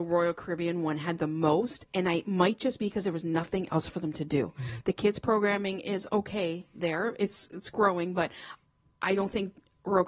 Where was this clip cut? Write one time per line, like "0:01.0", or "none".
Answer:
0:04.8